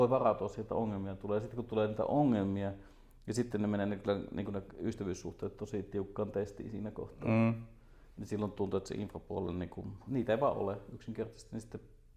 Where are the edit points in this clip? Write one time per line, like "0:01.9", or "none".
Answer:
0:08.1
0:10.1